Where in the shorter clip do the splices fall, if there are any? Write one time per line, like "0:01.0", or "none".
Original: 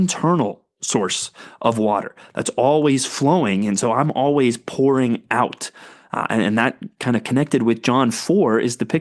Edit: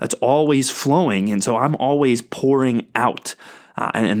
none